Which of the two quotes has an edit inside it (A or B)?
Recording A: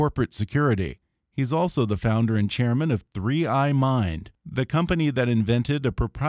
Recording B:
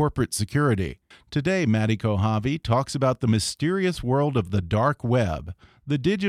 B